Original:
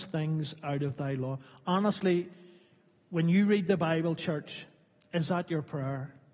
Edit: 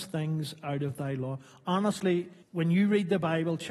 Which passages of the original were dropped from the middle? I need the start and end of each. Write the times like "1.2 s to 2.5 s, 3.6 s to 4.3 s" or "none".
2.4 s to 3.0 s